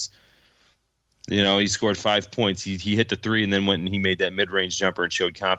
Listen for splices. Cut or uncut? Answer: uncut